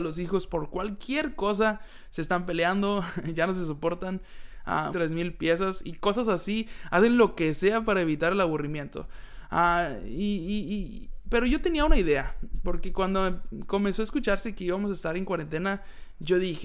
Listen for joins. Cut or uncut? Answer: cut